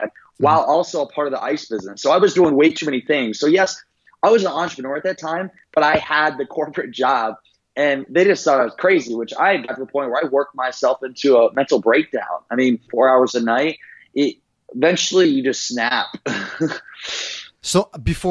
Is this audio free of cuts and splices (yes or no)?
no